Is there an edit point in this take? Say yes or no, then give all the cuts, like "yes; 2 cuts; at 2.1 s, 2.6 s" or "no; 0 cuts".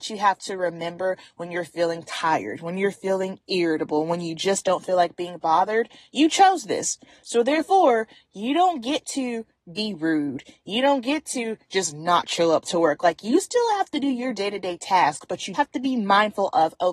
yes; 1 cut; at 15.5 s